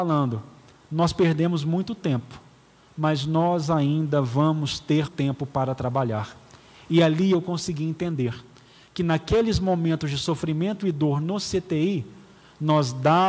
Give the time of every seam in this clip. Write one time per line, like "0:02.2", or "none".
0:05.1